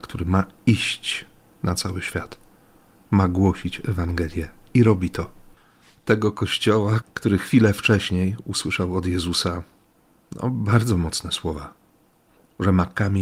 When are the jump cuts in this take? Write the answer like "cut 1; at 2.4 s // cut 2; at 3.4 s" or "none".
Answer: cut 1; at 7.0 s

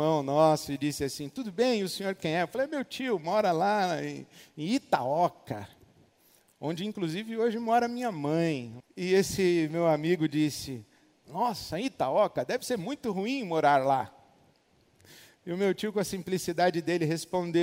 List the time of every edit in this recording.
cut 1; at 8.8 s

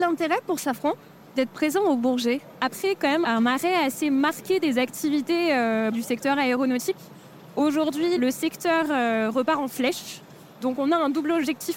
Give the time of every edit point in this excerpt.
none

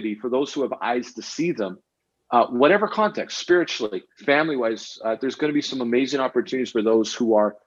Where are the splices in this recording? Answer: cut 1; at 4.2 s

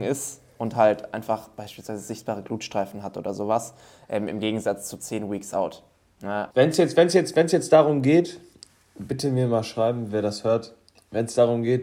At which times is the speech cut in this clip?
cut 1; at 6.5 s

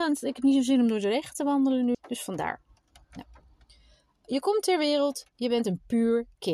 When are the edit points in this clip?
cut 1; at 1.9 s

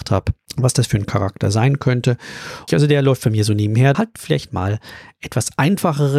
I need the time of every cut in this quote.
cut 1; at 2.7 s // cut 2; at 3.9 s

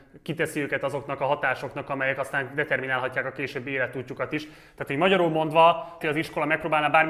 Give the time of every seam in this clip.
cut 1; at 6.0 s

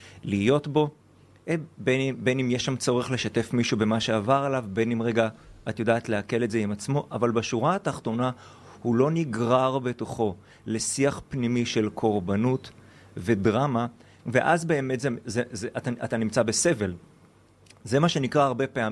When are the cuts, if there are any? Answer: cut 1; at 14.2 s

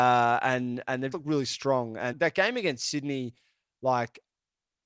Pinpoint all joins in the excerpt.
cut 1; at 1.1 s // cut 2; at 2.1 s

